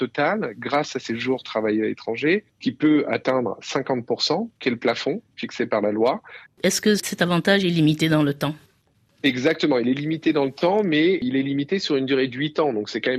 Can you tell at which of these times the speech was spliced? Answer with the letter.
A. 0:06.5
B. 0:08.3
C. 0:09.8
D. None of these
A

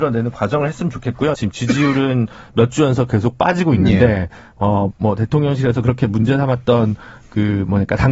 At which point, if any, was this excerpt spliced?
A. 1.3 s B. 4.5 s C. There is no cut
A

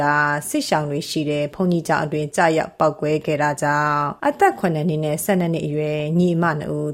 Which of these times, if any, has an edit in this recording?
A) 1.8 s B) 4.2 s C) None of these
B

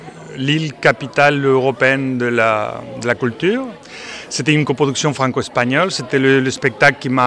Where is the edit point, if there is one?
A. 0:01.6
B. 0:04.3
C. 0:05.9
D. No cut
D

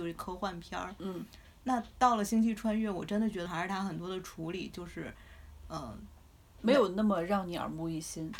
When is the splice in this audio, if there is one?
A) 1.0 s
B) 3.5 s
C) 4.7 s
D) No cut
B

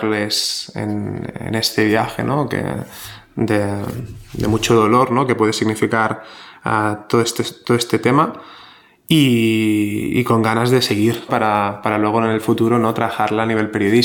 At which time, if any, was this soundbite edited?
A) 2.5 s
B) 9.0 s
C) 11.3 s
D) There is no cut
C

